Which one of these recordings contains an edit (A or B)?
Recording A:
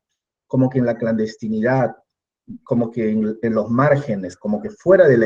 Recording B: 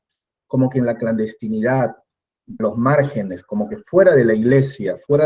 B